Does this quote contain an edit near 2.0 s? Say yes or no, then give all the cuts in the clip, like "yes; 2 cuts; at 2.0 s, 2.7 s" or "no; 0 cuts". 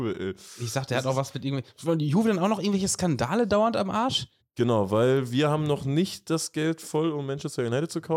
no; 1 cut; at 4.4 s